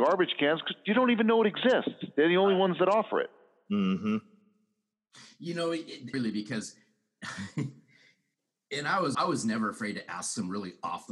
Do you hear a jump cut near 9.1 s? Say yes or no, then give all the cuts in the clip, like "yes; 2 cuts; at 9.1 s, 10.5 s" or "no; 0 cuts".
yes; 2 cuts; at 6.1 s, 9.1 s